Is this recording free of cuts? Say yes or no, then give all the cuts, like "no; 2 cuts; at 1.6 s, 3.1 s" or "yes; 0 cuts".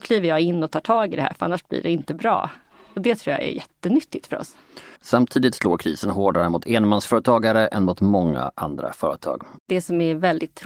no; 2 cuts; at 5.0 s, 9.6 s